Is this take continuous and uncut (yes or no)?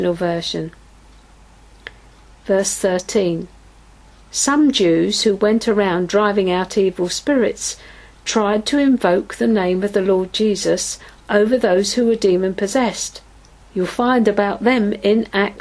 no